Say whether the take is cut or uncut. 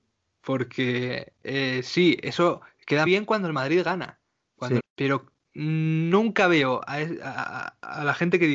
cut